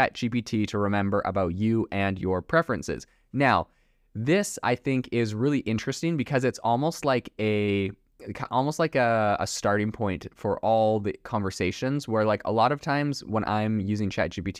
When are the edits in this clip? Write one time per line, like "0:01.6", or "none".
none

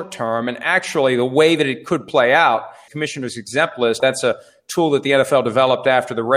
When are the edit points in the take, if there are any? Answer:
0:02.9
0:04.0

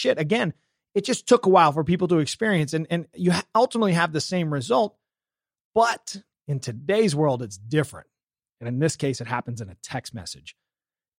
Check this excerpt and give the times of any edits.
none

